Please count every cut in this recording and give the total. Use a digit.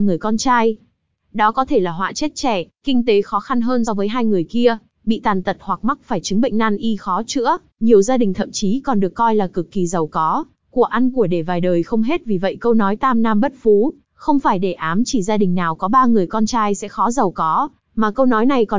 2